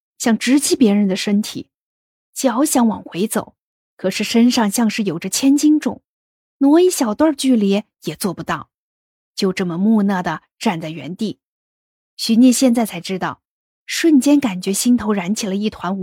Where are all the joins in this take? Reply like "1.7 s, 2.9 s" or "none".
12.1 s, 13.8 s

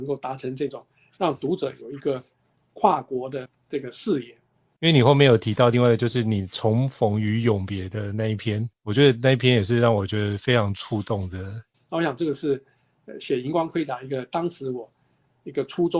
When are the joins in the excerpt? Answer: 4.8 s, 11.7 s

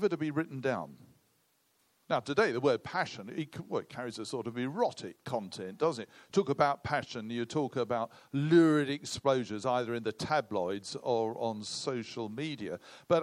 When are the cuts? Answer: 2.1 s

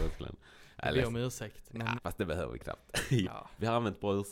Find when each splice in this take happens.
2.0 s, 3.2 s

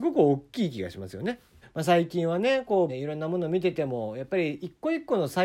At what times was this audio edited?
1.6 s, 2.9 s

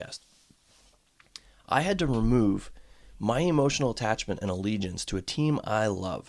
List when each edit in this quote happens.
none

